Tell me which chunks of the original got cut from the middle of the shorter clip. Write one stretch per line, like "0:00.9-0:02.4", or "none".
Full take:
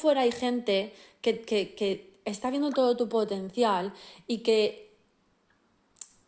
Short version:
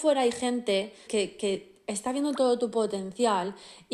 0:01.1-0:01.4